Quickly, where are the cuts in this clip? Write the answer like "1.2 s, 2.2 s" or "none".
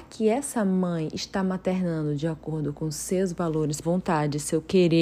3.8 s